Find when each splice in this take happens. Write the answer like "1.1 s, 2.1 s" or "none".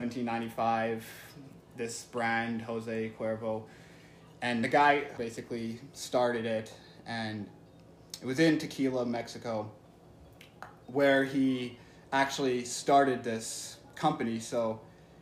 5.2 s